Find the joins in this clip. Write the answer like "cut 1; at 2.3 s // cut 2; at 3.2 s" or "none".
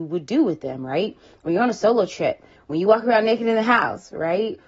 none